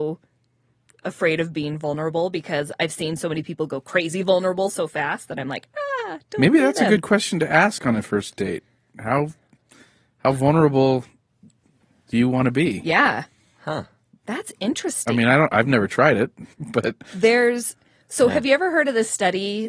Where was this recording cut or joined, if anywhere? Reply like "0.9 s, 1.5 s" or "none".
16.5 s